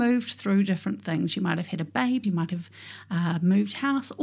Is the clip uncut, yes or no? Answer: no